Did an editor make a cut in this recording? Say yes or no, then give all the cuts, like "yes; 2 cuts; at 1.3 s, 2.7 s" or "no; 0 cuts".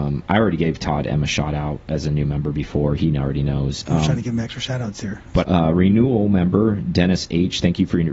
yes; 1 cut; at 5.4 s